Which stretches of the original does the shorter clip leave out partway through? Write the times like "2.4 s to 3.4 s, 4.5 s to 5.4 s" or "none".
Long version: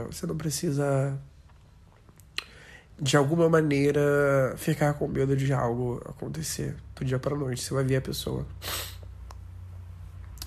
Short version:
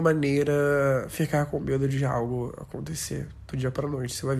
none

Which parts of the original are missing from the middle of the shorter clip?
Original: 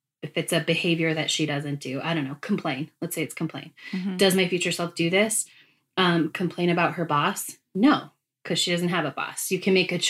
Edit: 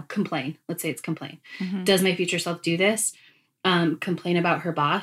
none

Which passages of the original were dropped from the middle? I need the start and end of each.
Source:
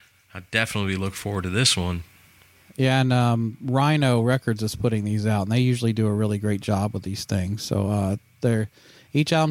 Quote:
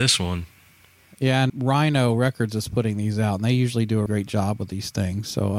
3.1 s to 3.6 s, 6.1 s to 6.4 s

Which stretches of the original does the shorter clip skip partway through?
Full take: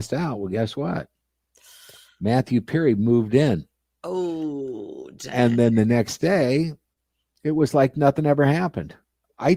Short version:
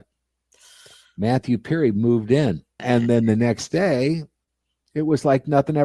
3.8 s to 5.3 s

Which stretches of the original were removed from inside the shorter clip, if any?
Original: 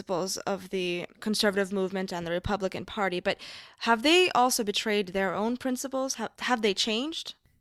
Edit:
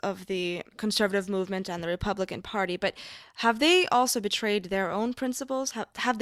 none

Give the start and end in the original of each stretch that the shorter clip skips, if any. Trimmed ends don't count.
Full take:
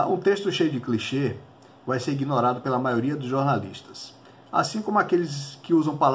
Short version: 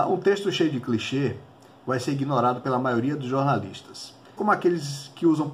4.4 s to 4.8 s

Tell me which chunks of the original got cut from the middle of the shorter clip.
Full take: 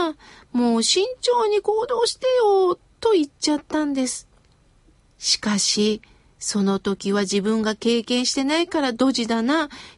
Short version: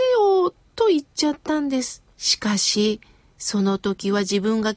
4.4 s to 5.1 s

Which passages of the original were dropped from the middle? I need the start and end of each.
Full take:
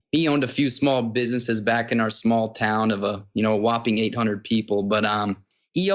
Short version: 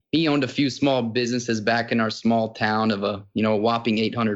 none

